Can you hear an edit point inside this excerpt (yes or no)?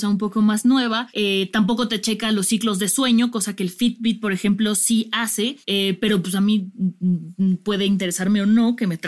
no